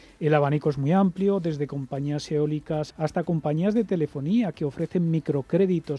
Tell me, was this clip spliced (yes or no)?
yes